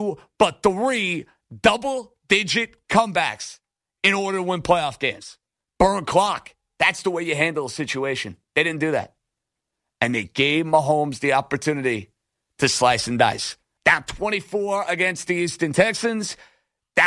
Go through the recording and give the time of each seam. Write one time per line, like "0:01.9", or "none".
0:05.6
0:13.8